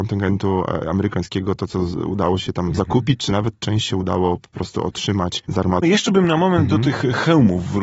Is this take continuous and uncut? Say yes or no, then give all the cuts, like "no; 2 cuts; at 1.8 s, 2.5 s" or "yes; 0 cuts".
no; 1 cut; at 5.8 s